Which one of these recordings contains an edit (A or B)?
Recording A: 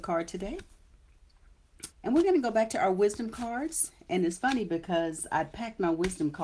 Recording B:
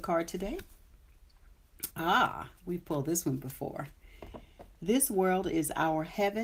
A